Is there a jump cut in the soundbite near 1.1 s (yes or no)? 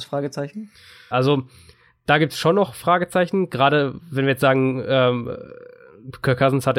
yes